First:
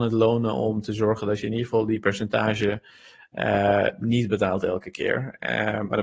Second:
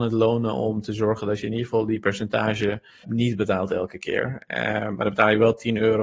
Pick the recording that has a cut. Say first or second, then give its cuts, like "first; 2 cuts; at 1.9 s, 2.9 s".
second; 1 cut; at 3.0 s